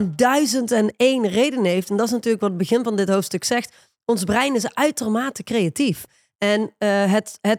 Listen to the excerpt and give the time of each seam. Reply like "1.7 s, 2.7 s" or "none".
none